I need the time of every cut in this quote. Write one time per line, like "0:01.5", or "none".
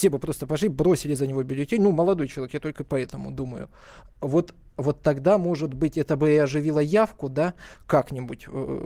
none

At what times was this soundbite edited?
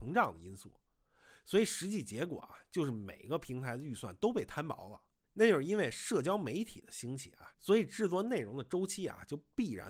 0:05.2
0:07.5

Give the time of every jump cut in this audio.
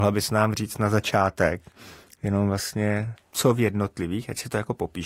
0:03.2

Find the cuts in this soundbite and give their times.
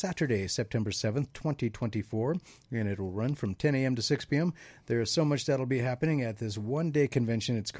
none

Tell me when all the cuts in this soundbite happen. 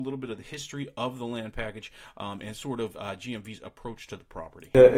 none

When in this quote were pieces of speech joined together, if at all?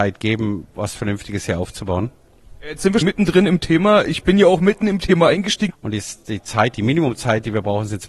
0:03.0
0:05.7

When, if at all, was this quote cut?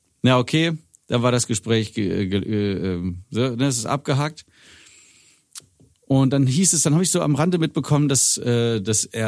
0:05.9

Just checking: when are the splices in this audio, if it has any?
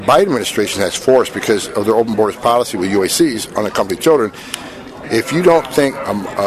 0:05.0

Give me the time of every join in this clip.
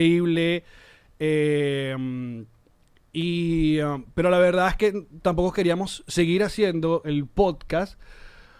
none

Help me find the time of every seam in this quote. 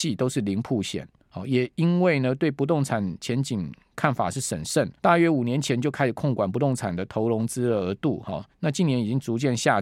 0:05.0

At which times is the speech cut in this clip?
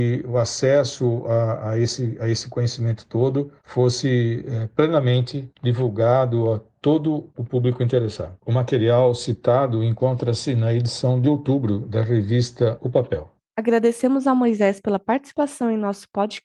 none

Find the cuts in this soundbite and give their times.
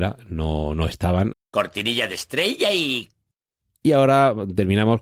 0:01.3

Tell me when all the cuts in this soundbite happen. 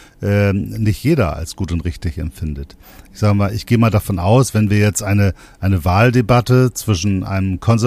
none

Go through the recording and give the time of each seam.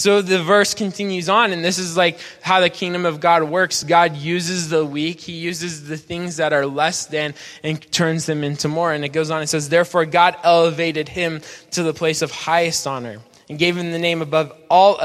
none

